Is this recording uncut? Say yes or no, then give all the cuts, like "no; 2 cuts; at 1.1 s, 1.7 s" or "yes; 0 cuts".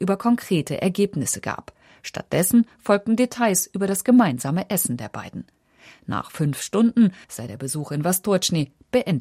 no; 1 cut; at 7.2 s